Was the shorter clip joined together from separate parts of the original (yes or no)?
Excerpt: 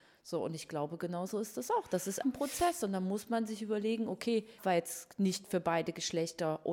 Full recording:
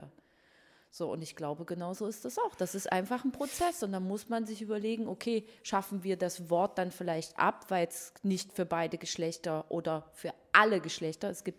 yes